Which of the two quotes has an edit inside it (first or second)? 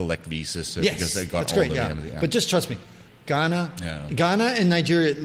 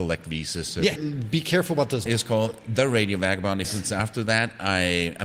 second